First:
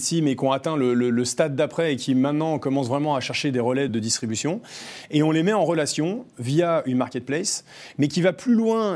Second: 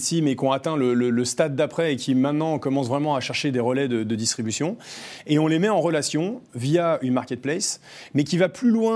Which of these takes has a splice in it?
first; 1 cut; at 3.9 s

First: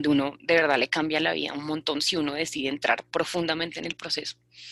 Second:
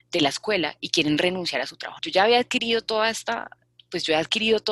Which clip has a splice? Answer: second; 1 cut; at 2.0 s

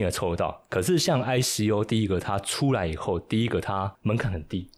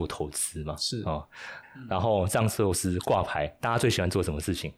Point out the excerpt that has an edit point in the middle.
second; 1 cut; at 1.6 s

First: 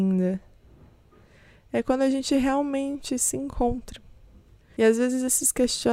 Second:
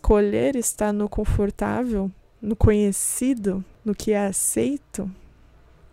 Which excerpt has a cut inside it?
first; 1 cut; at 4.6 s

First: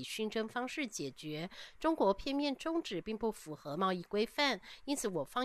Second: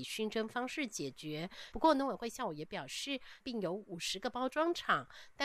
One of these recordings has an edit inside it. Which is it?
second; 2 cuts; at 1.7 s, 3.4 s

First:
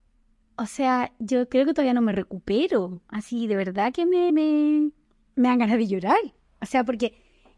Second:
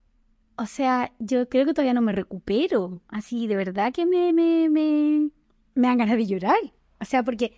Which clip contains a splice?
first; 1 cut; at 4.3 s

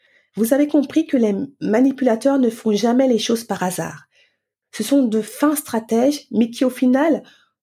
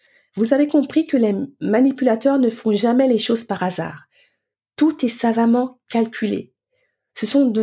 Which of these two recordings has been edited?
first; 1 cut; at 4.6 s

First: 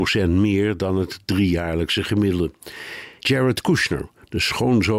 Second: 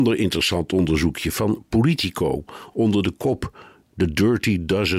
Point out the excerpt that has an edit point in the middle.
first; 1 cut; at 3.2 s

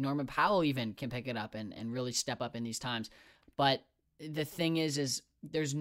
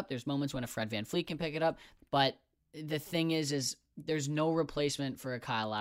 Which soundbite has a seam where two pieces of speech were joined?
second; 1 cut; at 2.0 s

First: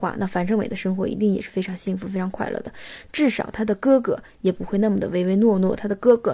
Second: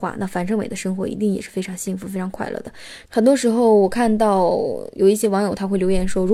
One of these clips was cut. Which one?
second; 1 cut; at 3.1 s

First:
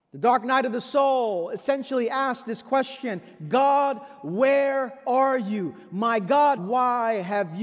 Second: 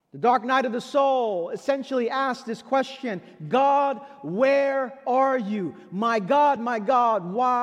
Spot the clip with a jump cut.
first; 1 cut; at 6.6 s

